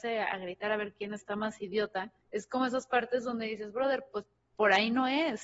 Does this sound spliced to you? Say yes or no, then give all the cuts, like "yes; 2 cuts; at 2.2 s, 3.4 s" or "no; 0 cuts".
yes; 1 cut; at 2.2 s